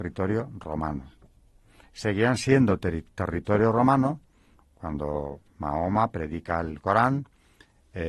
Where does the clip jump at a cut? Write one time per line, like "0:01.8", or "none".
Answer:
none